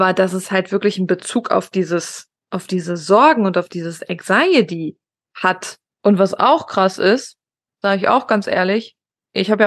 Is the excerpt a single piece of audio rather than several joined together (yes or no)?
no